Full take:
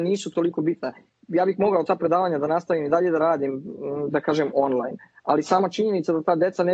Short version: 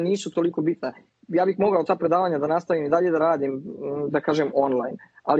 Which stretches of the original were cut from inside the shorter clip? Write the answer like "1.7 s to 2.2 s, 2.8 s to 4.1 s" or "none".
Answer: none